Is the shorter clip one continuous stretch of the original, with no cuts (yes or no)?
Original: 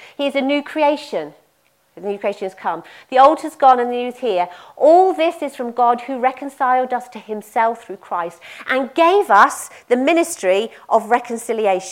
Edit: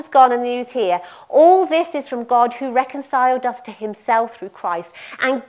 yes